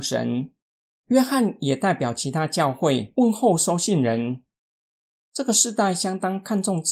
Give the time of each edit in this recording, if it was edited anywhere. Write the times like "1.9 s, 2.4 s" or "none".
5.2 s